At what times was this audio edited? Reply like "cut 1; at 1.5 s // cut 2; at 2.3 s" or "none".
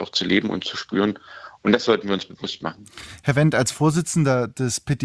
none